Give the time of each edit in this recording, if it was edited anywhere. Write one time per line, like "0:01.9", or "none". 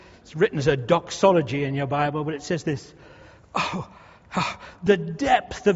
none